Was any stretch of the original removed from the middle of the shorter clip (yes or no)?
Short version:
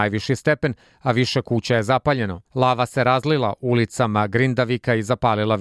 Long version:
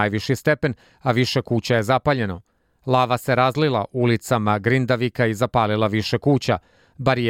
yes